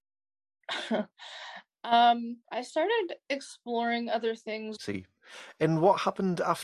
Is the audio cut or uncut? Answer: cut